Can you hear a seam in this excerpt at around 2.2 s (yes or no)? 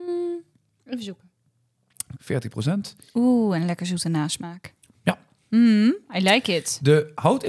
yes